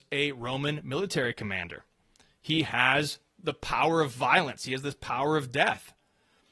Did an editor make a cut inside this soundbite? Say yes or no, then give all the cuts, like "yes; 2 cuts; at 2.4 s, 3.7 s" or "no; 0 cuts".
no; 0 cuts